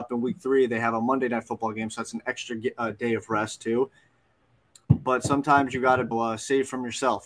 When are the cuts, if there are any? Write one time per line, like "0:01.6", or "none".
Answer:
0:04.7
0:06.1

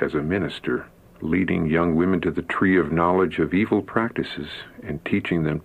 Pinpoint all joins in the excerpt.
0:01.0

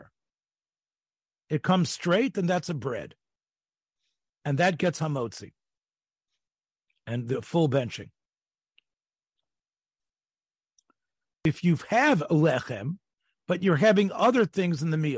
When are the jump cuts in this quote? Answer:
none

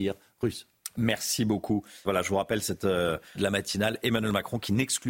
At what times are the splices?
0:02.0
0:03.3

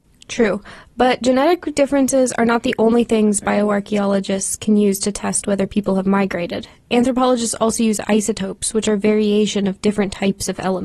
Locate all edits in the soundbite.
none

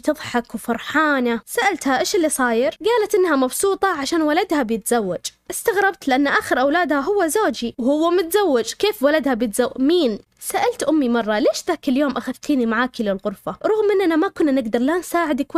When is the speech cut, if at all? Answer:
0:10.3

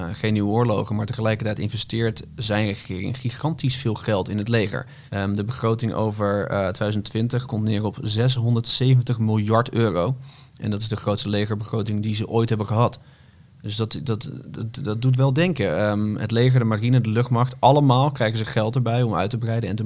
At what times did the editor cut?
0:05.1

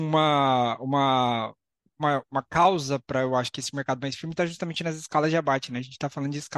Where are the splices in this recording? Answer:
none

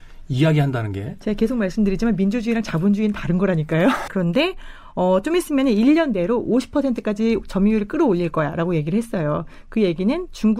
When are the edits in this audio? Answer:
0:04.1

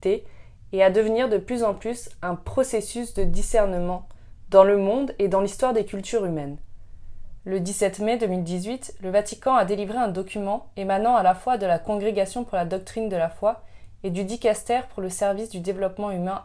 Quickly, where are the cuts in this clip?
0:07.4

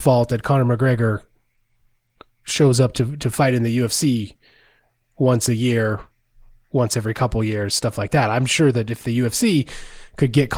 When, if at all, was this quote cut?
none

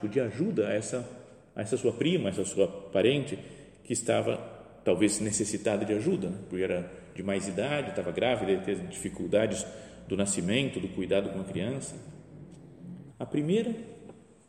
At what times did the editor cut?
0:13.1

